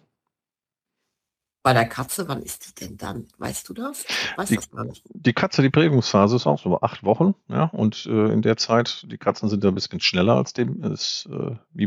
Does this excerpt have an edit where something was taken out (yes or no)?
no